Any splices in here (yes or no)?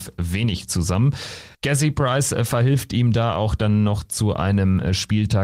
yes